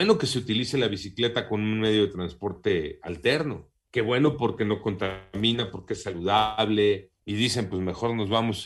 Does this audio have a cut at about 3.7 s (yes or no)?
no